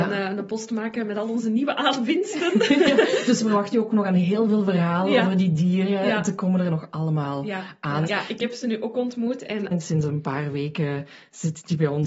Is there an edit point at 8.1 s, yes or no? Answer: yes